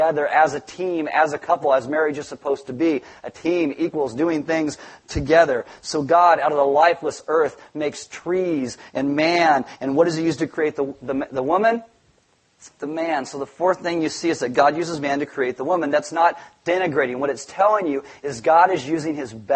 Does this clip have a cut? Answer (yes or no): no